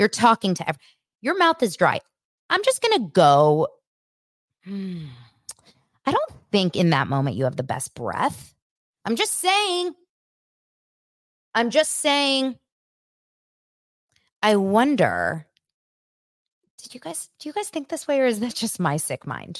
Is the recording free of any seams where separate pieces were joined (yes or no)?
yes